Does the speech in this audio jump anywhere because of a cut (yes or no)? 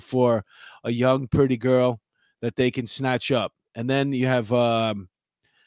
no